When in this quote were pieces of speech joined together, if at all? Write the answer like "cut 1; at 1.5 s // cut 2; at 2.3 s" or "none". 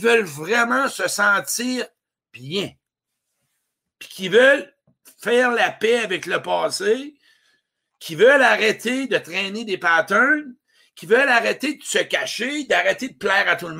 none